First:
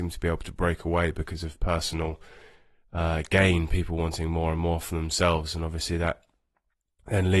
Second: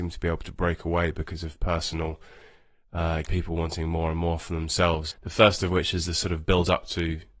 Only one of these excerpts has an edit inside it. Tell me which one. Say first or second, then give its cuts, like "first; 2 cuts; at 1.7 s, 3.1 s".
second; 2 cuts; at 3.3 s, 5.1 s